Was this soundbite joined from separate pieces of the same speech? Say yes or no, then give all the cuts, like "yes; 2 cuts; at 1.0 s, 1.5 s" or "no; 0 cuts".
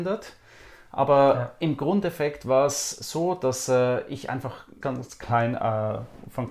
yes; 1 cut; at 4.8 s